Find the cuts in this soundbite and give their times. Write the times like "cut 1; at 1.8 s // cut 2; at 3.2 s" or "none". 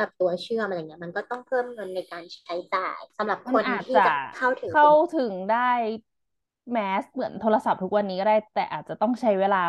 cut 1; at 3.1 s